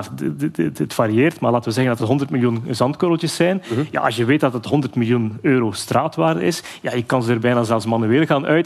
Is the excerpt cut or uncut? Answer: uncut